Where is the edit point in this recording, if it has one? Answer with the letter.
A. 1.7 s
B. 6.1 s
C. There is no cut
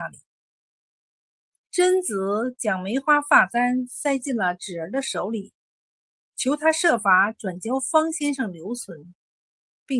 C